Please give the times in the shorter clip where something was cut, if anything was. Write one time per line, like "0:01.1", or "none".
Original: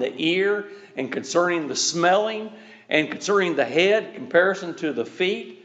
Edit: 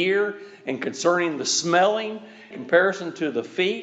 0:02.5